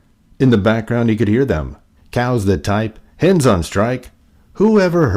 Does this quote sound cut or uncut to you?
cut